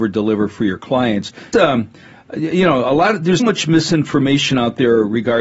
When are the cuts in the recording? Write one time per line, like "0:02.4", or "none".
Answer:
0:01.5
0:03.4